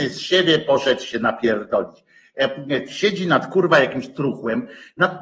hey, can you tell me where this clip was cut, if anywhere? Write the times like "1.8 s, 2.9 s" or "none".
2.9 s